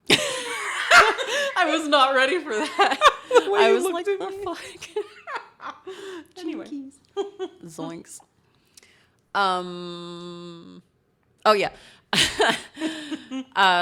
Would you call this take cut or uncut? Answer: uncut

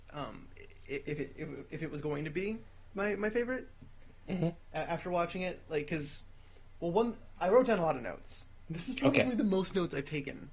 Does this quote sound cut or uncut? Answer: uncut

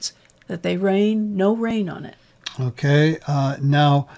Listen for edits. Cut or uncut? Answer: uncut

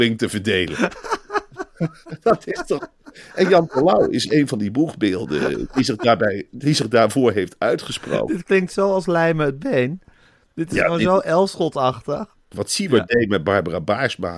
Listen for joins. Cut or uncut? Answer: cut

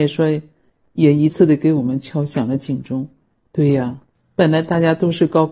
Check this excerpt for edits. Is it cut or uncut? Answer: cut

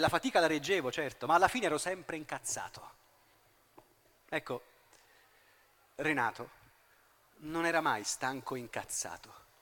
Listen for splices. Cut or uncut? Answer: uncut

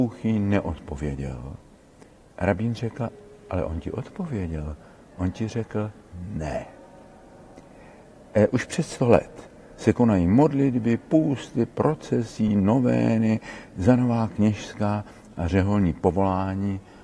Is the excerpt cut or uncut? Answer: uncut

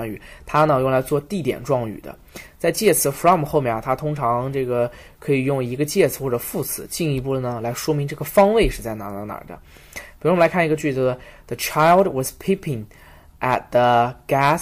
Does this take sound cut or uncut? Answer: uncut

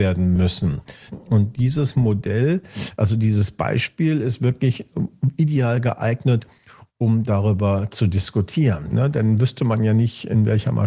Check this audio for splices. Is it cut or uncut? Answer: cut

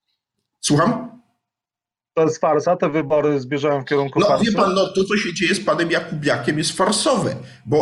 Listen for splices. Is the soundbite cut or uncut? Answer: uncut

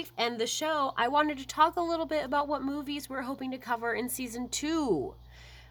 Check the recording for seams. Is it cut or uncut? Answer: uncut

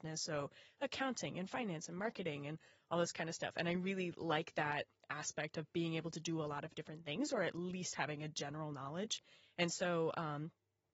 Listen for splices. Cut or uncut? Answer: uncut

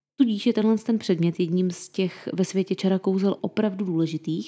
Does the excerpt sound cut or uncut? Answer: cut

